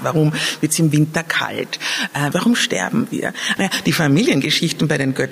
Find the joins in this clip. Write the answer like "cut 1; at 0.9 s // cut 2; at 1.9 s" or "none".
cut 1; at 2.3 s // cut 2; at 3.6 s